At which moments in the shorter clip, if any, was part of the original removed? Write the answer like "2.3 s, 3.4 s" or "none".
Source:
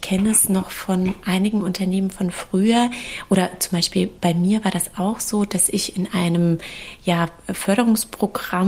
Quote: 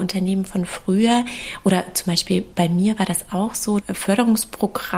3.8 s